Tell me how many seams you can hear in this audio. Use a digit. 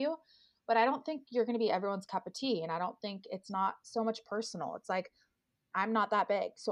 1